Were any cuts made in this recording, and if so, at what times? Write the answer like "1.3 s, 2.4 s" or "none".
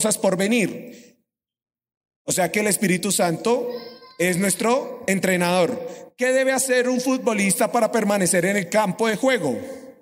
none